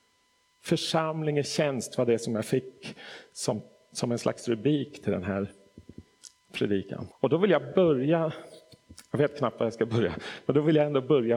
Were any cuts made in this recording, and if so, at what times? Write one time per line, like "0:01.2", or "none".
0:07.1